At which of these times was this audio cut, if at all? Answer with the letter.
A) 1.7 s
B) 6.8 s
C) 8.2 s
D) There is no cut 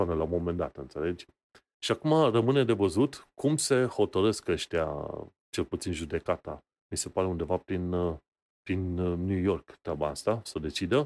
A